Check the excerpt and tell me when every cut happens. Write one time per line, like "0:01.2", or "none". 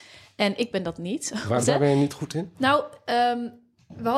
0:01.6